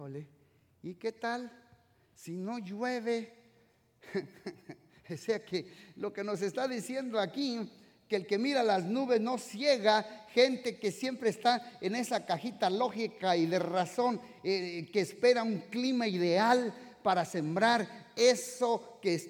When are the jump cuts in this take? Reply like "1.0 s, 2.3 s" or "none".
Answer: none